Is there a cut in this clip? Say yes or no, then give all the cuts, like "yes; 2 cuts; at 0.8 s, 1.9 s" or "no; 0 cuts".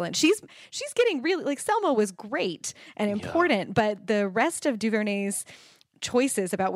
no; 0 cuts